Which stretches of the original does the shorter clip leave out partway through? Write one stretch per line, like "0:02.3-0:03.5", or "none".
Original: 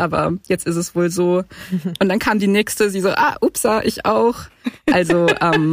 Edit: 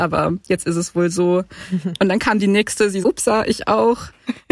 0:03.0-0:03.4